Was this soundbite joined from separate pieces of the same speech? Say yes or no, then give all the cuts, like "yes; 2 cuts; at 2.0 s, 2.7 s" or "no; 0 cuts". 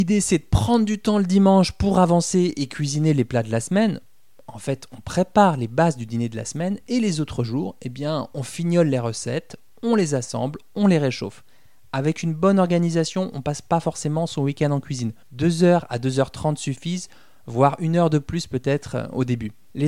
no; 0 cuts